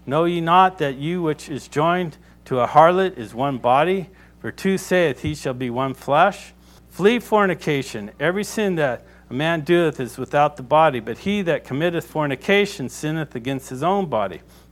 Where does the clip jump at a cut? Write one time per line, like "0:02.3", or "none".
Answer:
0:06.8